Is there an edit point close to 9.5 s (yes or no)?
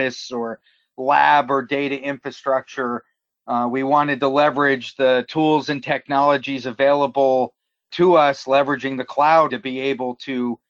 yes